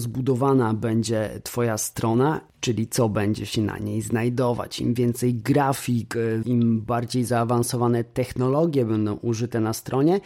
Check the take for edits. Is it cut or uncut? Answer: cut